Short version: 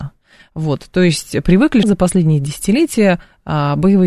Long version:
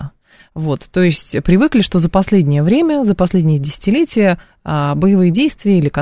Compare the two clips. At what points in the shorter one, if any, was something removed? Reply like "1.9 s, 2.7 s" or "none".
1.8 s